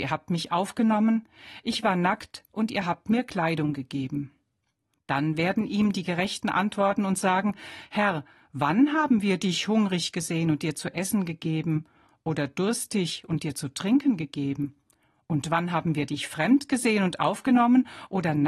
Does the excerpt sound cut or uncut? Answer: uncut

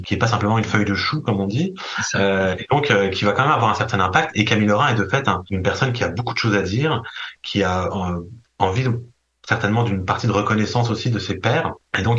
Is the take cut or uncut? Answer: uncut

